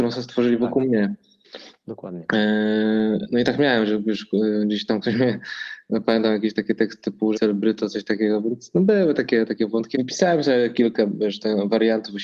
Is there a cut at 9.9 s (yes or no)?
yes